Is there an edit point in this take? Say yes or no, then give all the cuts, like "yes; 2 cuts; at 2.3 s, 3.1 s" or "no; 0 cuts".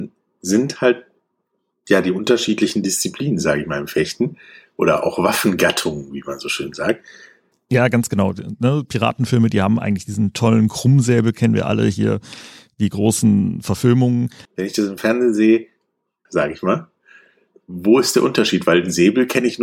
yes; 3 cuts; at 7.5 s, 14.4 s, 16.3 s